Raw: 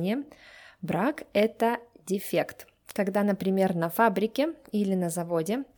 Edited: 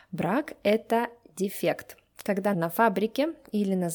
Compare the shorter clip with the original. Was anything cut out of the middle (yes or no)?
yes